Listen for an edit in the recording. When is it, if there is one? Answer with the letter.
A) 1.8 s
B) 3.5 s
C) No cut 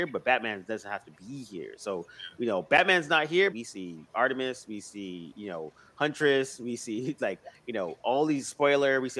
B